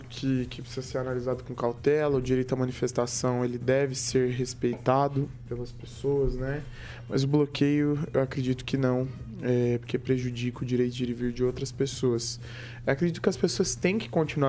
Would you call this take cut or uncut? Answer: uncut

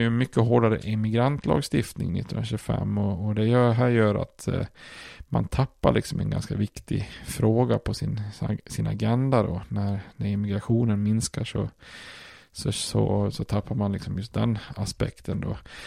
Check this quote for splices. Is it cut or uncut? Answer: uncut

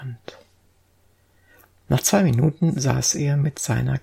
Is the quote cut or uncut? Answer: uncut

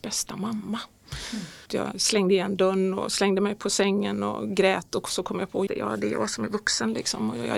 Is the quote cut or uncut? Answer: cut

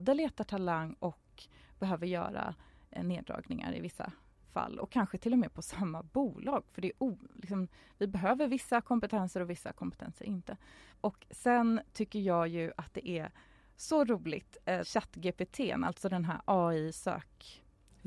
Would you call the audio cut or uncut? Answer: cut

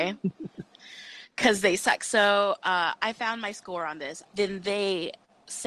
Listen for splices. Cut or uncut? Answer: cut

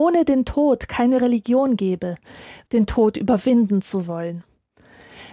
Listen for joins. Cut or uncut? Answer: cut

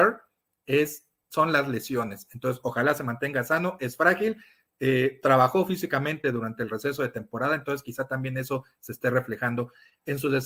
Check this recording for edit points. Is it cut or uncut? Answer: uncut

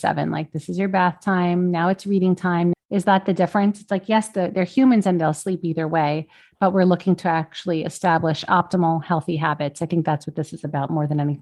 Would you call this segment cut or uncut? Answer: cut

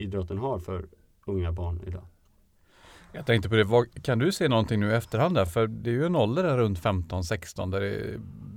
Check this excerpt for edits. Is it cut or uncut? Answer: uncut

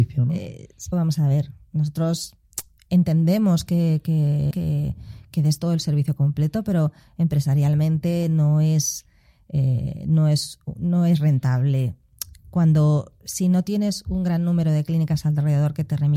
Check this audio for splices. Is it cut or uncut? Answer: cut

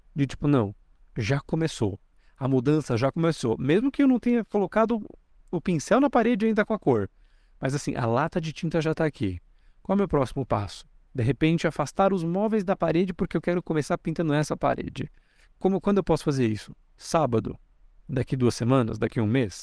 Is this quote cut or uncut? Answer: uncut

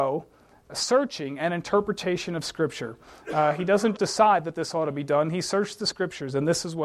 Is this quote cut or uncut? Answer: cut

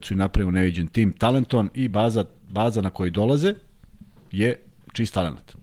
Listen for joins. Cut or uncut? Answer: uncut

